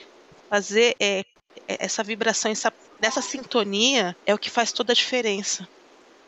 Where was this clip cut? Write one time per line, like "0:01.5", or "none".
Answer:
0:02.9
0:04.2